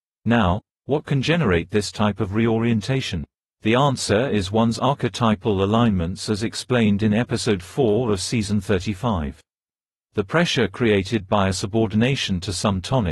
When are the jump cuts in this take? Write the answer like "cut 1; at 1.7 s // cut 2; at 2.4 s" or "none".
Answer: none